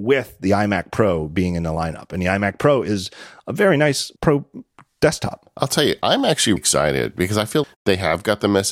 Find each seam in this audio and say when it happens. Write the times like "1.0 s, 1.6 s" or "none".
4.2 s, 6.6 s, 7.6 s